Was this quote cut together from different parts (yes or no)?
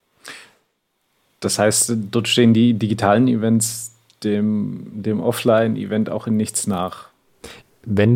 no